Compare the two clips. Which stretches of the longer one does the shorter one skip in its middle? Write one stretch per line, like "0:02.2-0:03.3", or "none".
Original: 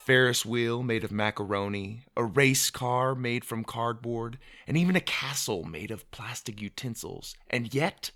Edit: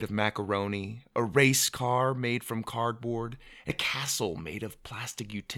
0:04.7-0:05.0

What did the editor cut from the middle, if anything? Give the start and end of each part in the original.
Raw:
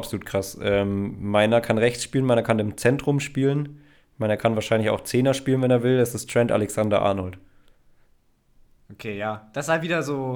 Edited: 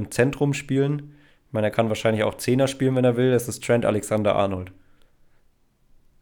none

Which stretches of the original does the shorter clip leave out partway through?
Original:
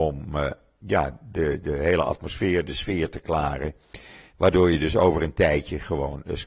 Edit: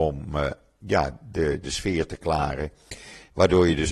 0:01.6-0:02.7

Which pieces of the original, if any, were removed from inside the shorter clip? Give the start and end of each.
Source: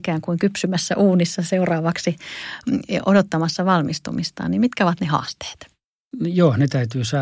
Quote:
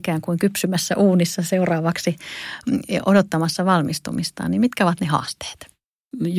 none

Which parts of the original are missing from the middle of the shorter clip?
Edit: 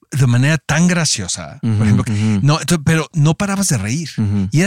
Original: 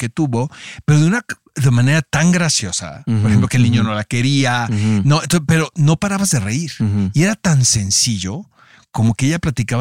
0:03.5-0:04.7

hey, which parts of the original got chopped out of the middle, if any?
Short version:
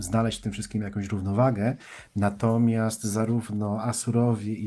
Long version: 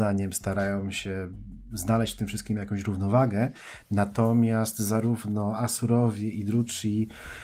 none

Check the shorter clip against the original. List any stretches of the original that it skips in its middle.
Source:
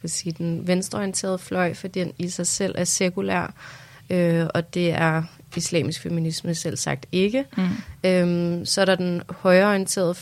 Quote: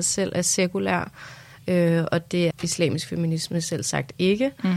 0:04.9-0:05.4

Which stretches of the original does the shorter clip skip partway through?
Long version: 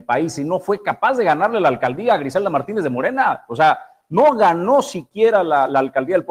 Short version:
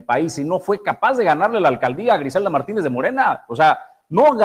none

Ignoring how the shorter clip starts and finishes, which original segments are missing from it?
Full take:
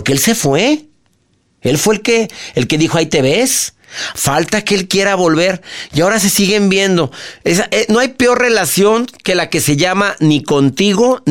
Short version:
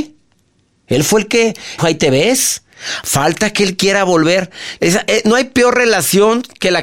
0:02.5-0:02.9
0:05.9-0:07.4

